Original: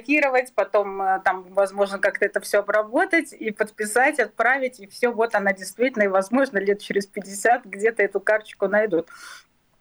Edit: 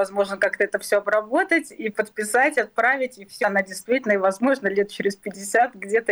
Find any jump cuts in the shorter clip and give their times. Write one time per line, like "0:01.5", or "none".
0:03.4

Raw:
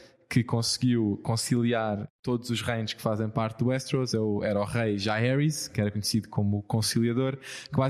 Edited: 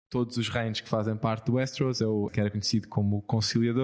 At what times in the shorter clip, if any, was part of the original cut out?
0:02.3

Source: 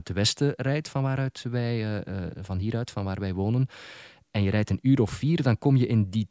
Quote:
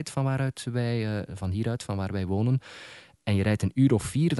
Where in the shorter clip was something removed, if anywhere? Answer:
0:01.3

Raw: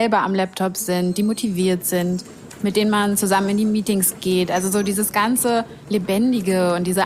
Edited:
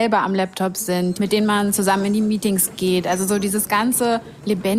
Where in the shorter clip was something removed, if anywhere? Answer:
0:01.1

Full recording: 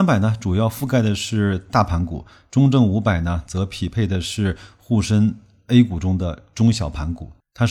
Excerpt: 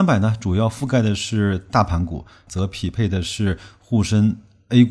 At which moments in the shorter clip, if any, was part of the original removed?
0:02.5

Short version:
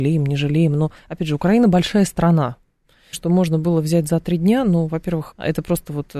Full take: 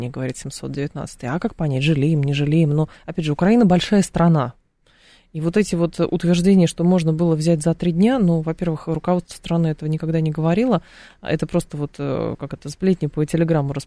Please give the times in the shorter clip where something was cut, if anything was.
0:03.1
0:05.3

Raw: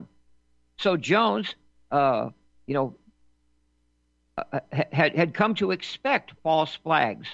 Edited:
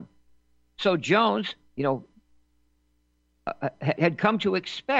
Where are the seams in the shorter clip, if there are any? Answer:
0:01.7
0:04.0

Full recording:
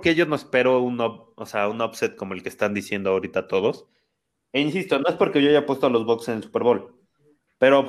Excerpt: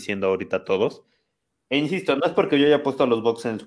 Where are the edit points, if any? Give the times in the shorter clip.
none

